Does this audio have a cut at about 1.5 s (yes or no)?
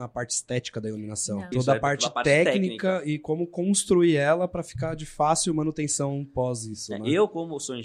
yes